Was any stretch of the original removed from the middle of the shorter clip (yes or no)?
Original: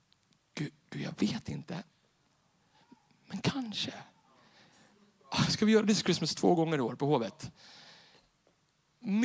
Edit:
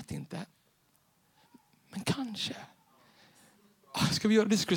no